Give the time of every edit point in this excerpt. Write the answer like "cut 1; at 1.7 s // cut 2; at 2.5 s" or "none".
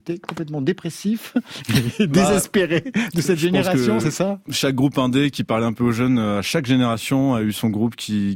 none